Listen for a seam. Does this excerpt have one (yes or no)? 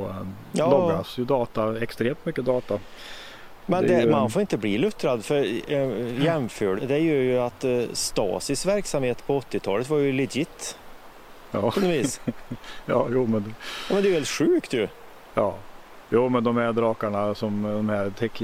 yes